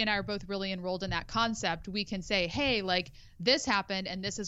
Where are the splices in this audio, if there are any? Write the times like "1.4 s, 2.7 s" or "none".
none